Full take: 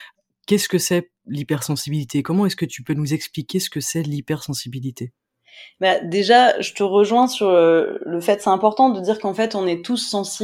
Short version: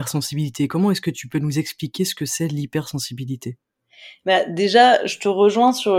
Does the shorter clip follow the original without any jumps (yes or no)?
yes